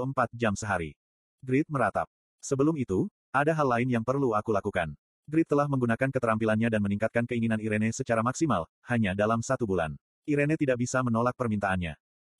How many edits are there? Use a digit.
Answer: 2